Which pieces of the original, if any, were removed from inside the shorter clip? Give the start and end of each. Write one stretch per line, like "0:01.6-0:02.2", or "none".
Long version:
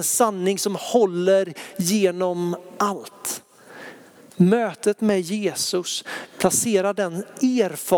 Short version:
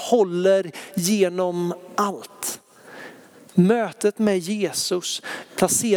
none